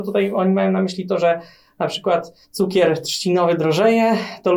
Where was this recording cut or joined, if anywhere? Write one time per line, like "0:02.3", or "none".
0:02.4